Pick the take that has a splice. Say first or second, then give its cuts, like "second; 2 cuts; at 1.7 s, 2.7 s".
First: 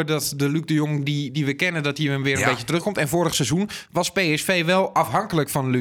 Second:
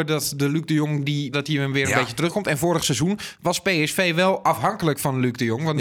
second; 1 cut; at 1.3 s